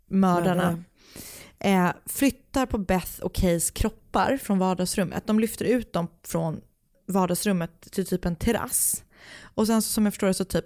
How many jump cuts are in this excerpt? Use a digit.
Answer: 0